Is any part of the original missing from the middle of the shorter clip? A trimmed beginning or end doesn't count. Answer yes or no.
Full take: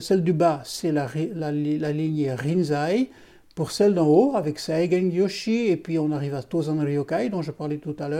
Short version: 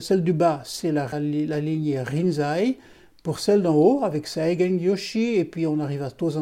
yes